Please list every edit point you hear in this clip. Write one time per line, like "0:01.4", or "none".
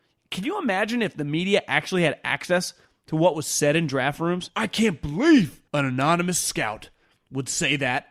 0:04.5
0:05.7